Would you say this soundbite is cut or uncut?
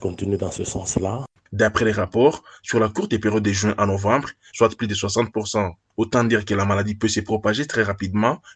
cut